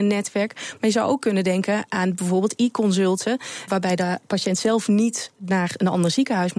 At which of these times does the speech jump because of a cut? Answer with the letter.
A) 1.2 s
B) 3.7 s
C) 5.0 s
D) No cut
B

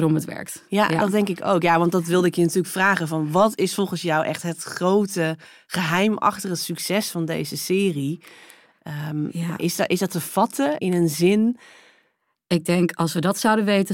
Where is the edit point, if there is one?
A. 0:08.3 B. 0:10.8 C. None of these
B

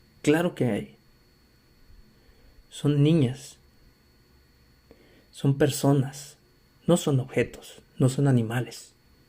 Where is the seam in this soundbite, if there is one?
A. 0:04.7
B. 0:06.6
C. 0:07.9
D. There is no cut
D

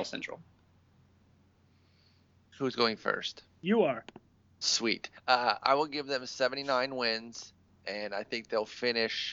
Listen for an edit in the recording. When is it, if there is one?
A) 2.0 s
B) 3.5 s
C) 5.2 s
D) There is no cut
C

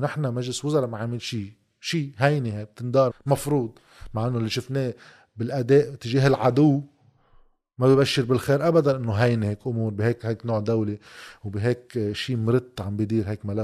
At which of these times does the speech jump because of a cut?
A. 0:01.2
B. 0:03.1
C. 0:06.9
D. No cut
B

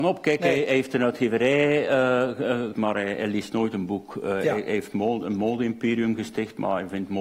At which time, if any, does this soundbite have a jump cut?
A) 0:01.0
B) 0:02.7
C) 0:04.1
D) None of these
B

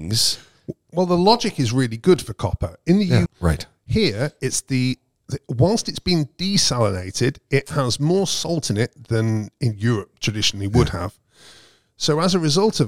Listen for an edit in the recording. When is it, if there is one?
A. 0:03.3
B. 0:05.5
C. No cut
A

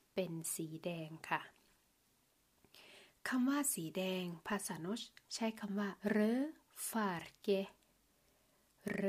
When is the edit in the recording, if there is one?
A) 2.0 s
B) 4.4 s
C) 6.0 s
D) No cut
C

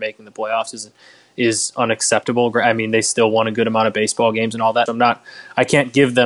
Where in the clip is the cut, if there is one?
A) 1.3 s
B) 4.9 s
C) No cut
B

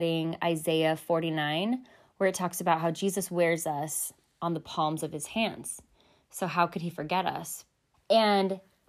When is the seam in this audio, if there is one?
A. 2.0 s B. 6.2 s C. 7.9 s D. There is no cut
C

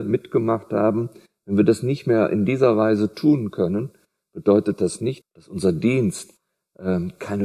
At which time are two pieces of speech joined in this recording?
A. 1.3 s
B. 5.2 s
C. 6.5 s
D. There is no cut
B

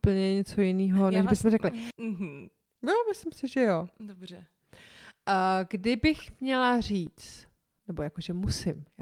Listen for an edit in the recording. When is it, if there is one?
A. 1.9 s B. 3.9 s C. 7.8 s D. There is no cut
A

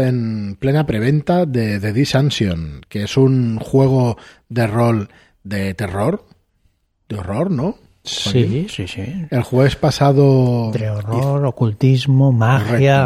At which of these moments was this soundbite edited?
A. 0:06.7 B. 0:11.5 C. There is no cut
C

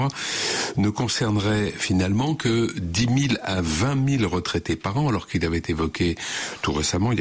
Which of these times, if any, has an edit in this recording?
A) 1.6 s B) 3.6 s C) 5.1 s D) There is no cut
D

